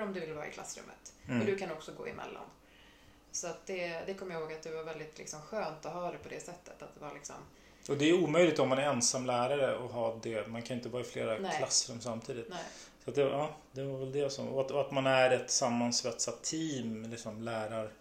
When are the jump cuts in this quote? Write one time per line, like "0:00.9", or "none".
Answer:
none